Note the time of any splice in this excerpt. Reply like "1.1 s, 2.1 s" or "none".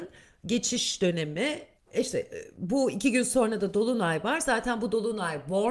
1.8 s